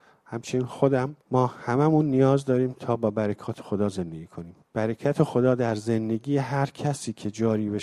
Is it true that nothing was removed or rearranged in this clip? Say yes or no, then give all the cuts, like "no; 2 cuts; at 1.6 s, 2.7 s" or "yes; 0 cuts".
no; 2 cuts; at 1.2 s, 4.6 s